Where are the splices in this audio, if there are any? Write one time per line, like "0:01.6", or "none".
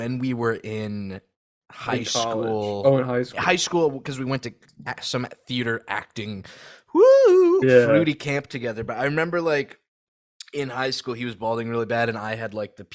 0:07.6